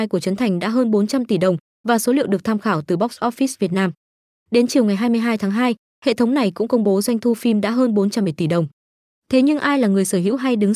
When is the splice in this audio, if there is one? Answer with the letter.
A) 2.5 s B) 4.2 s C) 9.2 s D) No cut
D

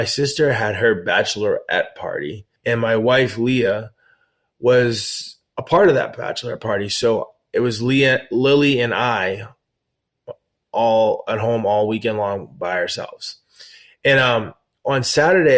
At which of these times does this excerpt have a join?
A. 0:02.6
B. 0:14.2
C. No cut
A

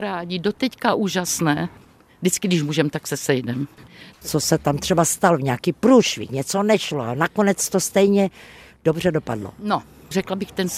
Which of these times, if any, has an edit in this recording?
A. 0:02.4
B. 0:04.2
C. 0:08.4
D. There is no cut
B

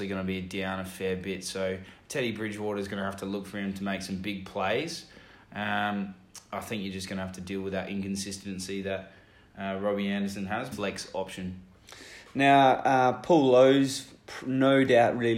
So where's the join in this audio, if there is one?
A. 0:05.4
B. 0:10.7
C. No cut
B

